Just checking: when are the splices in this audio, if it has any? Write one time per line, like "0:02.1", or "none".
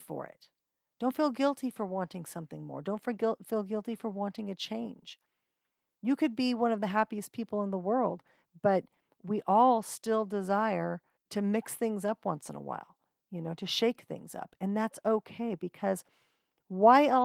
none